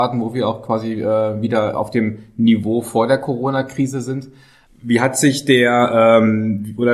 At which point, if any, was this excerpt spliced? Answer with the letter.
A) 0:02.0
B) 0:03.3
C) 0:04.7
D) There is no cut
C